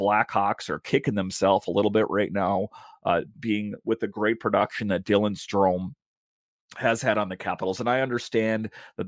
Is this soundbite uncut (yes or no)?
yes